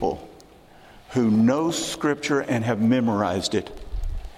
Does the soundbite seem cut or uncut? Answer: uncut